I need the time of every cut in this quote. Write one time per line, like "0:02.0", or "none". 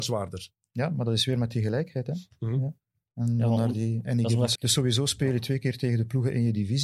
0:04.6